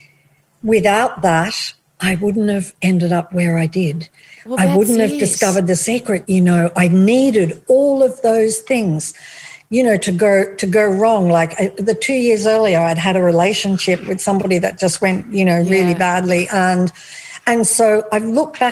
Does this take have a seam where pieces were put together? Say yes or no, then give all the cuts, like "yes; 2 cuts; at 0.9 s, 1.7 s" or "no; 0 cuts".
no; 0 cuts